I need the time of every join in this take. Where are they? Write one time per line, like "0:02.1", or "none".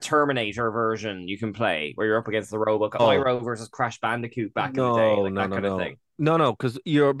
0:03.0